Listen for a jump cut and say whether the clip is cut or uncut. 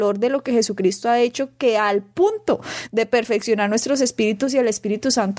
uncut